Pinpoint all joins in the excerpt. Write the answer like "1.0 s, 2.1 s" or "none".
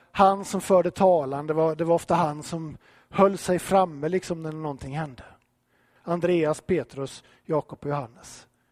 6.0 s